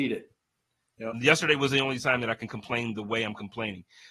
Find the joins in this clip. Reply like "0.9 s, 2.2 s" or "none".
1.1 s